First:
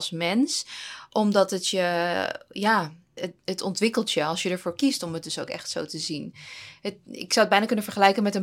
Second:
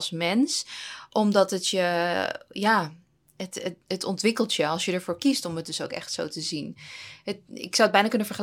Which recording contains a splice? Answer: first; 1 cut; at 3.2 s

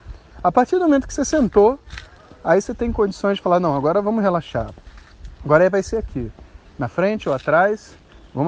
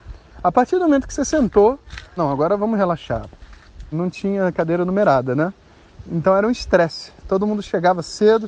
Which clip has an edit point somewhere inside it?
second; 2 cuts; at 2.2 s, 3.9 s

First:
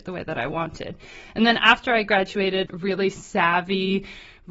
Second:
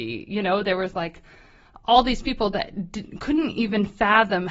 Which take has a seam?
first; 1 cut; at 2.7 s

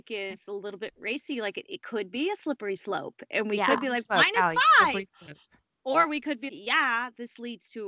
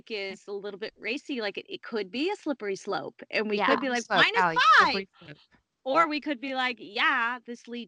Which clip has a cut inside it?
first; 1 cut; at 6.5 s

